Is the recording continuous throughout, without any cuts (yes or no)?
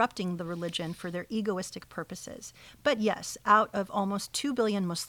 yes